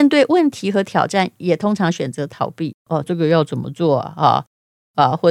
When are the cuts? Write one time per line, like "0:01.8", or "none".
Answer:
0:03.0

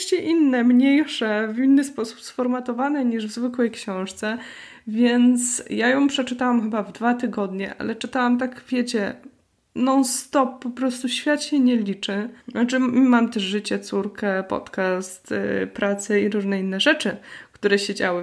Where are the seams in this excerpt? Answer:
0:12.4

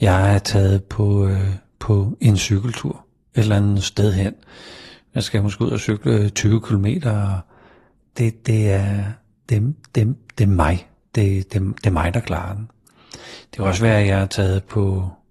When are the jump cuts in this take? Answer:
none

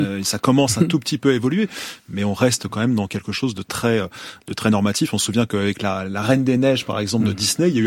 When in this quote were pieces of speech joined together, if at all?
none

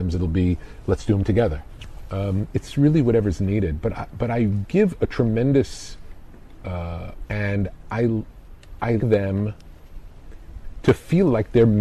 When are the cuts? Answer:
0:07.3
0:09.0

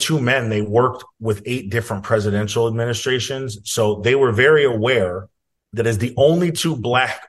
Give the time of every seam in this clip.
none

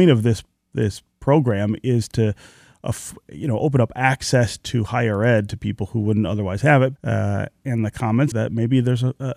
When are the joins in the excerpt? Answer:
0:07.0
0:08.3

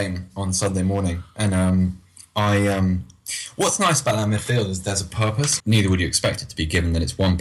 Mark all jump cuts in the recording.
0:05.6

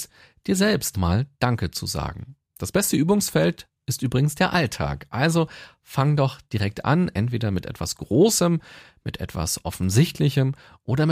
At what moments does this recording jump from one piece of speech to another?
0:00.9

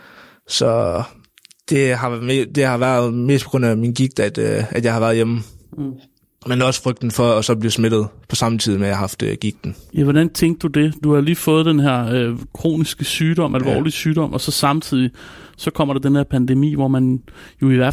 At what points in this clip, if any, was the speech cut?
none

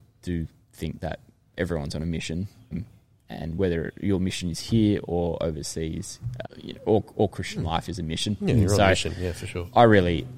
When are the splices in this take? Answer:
0:02.7
0:06.4

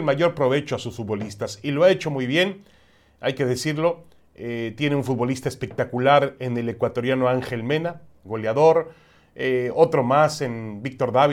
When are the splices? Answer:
none

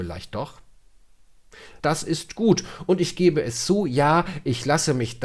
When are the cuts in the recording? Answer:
0:01.8

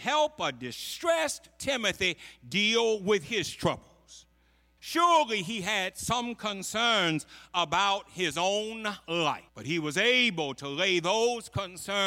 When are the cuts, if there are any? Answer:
0:04.8
0:09.5

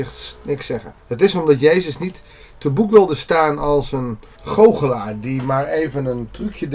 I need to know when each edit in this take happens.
0:01.0
0:04.3

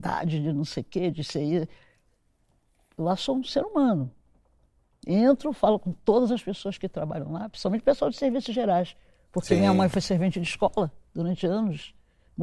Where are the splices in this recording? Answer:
none

